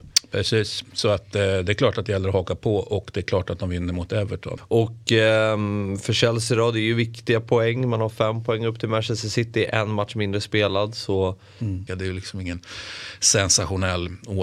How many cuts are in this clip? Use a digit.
2